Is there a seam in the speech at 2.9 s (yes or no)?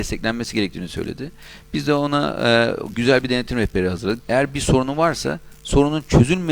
yes